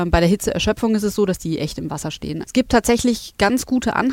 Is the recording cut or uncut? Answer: cut